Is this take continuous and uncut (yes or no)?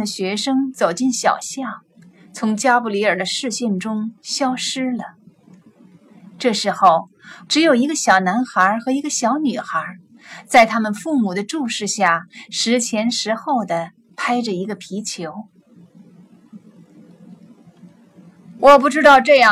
no